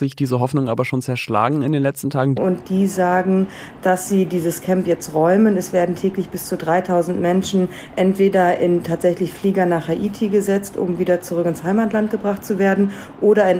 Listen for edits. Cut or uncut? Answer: cut